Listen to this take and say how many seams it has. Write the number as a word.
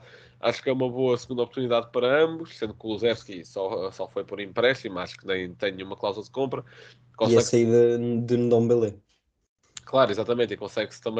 zero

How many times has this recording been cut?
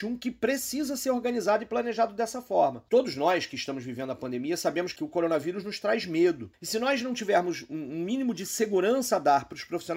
zero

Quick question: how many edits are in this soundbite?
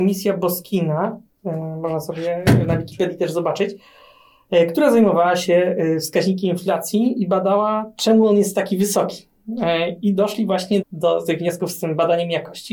one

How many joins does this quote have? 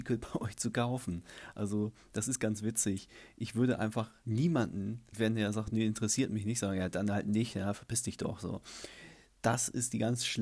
zero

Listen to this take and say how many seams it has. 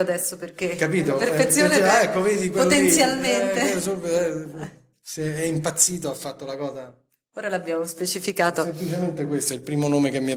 zero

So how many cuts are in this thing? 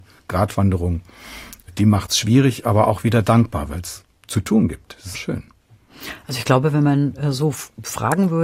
one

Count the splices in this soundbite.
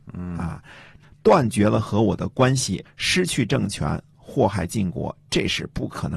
two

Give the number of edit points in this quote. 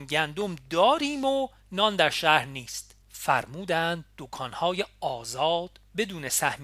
one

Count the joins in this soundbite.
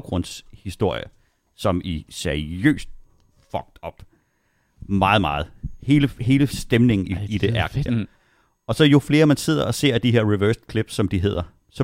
one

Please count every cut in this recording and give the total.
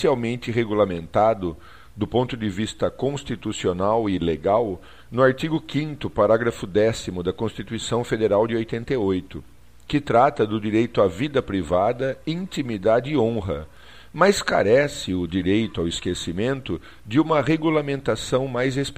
zero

